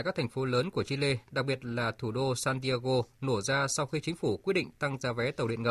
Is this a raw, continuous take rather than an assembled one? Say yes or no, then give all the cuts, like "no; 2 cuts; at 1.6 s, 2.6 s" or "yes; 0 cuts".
yes; 0 cuts